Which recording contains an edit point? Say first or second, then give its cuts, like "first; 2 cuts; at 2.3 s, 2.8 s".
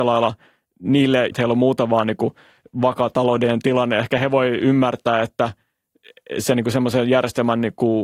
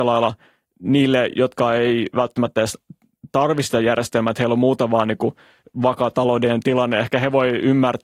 first; 1 cut; at 1.3 s